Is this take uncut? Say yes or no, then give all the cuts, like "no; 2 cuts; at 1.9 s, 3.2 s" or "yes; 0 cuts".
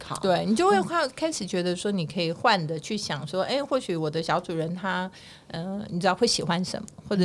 yes; 0 cuts